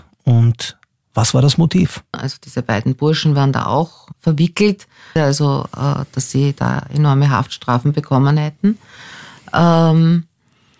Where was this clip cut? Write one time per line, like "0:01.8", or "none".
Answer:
0:02.1
0:05.2

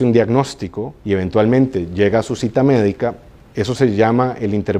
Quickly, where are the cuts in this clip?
0:01.0

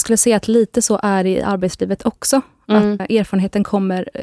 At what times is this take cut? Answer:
0:03.0

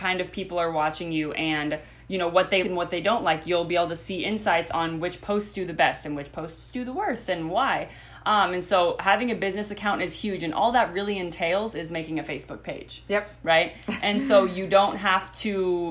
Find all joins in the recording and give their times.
0:02.6

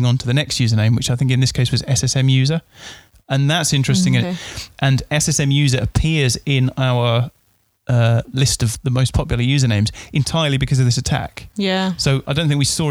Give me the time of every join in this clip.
0:04.2

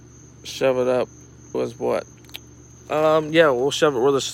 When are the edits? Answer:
0:01.5

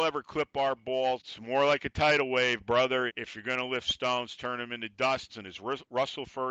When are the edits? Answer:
0:01.2
0:03.1
0:05.3

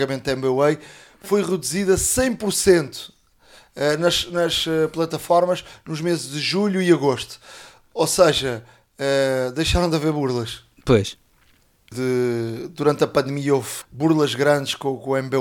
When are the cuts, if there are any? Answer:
0:11.9
0:13.8

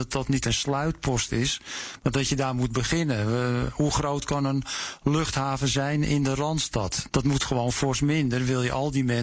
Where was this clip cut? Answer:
0:07.1

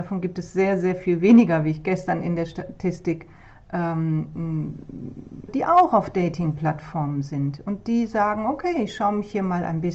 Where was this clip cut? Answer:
0:05.5

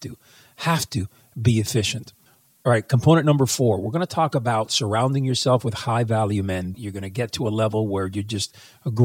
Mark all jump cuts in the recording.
0:06.7

